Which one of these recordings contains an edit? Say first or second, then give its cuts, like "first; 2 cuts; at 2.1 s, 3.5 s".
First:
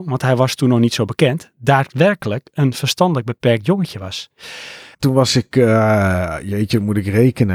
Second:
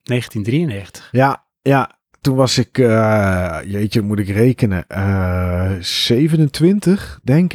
first; 1 cut; at 4.9 s